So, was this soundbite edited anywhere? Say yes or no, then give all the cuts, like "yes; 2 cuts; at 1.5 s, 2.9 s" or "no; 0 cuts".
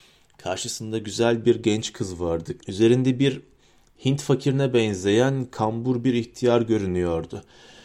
yes; 1 cut; at 2.6 s